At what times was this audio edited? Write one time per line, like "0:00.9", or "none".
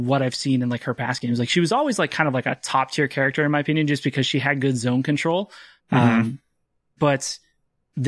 none